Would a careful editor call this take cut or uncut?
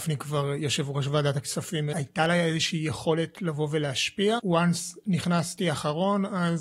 cut